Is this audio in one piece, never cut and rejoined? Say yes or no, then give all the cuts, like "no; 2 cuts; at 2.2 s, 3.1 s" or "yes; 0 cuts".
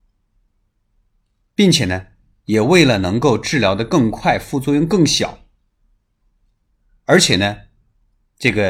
yes; 0 cuts